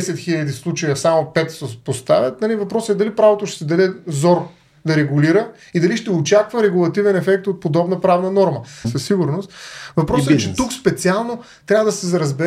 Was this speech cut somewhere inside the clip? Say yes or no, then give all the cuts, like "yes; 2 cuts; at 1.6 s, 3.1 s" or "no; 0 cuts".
yes; 1 cut; at 8.8 s